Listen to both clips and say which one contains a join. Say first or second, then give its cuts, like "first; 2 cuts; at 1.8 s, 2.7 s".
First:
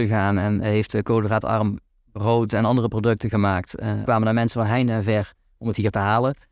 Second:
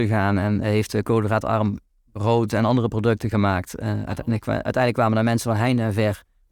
first; 1 cut; at 4.1 s